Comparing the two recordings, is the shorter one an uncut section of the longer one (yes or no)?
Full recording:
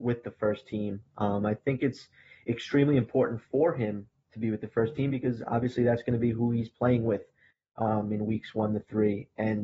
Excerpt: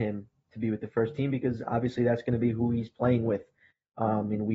yes